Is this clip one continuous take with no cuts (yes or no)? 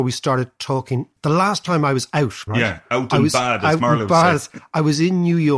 no